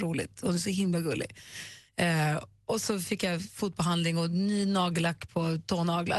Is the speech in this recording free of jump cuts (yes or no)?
yes